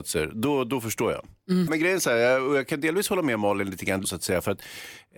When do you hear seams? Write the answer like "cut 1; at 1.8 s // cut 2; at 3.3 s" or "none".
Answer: cut 1; at 1.7 s // cut 2; at 4.0 s